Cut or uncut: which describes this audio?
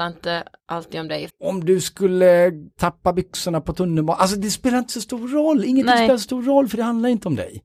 cut